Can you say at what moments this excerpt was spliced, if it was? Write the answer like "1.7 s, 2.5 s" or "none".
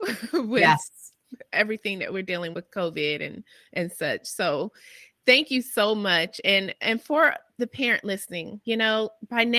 2.5 s